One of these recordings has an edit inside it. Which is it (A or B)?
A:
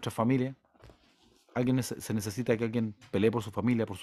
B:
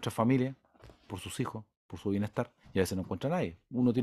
B